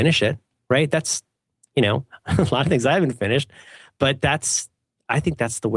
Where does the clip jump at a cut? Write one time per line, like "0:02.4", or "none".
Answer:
none